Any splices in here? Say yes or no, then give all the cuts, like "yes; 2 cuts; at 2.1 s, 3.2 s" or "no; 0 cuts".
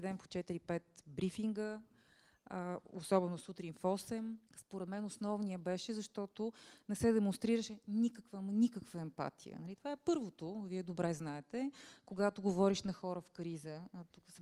yes; 1 cut; at 4.5 s